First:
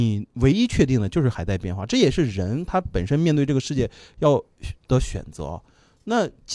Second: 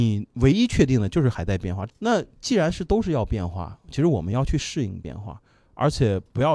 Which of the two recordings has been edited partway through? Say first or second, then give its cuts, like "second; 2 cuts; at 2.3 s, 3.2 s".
second; 1 cut; at 1.9 s